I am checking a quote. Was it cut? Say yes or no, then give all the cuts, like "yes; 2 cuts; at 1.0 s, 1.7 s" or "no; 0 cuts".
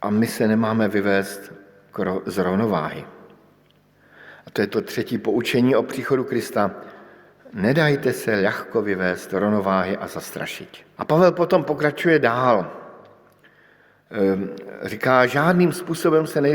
yes; 1 cut; at 11.0 s